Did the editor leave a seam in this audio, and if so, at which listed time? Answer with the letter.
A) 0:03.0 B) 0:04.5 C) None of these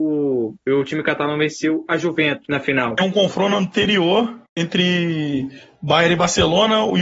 B